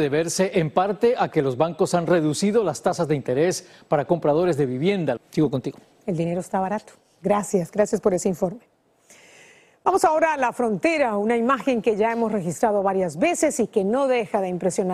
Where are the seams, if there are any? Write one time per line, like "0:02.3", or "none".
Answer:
0:05.2